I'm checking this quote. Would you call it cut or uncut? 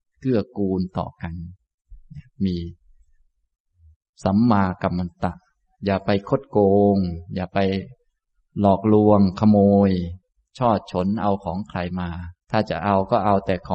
cut